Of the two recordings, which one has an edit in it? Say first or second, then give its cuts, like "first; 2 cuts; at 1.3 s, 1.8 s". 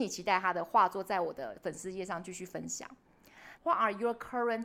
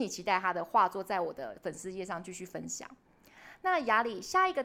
first; 1 cut; at 3.6 s